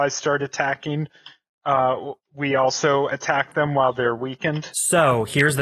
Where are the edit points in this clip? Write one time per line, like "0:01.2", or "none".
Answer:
0:02.2